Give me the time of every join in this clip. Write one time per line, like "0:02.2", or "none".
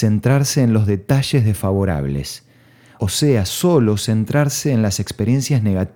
none